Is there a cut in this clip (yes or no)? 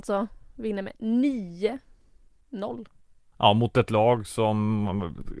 yes